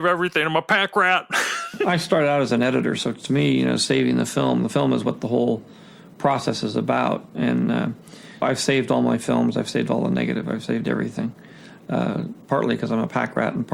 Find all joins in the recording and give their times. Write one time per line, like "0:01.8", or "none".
0:08.4

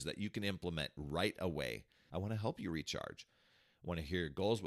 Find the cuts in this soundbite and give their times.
0:02.1

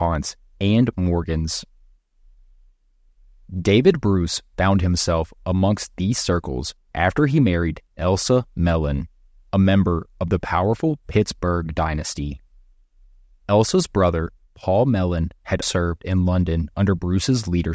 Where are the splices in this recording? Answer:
0:15.6

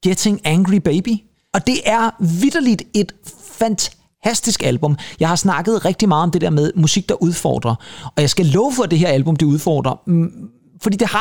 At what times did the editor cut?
none

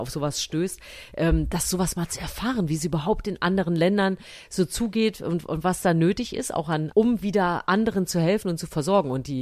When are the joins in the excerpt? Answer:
0:06.9

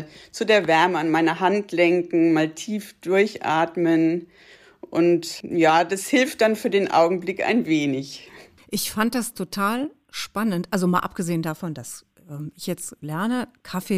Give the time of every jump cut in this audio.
none

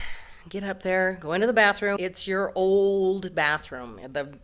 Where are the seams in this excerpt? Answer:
0:02.0

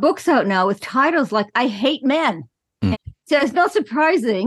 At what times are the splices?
0:02.9

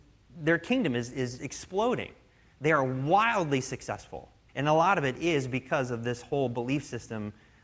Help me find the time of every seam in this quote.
0:01.4
0:04.5

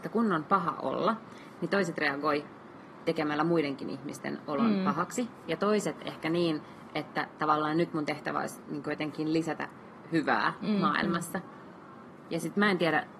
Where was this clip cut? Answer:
none

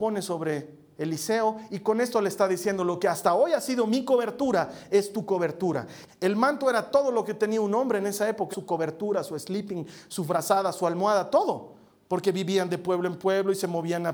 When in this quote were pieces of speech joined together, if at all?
0:06.1
0:08.5

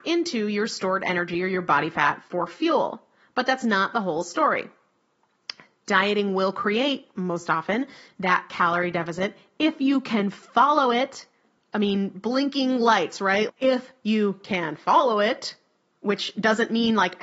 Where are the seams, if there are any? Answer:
0:13.5

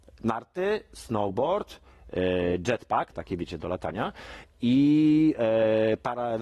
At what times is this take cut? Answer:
0:03.1

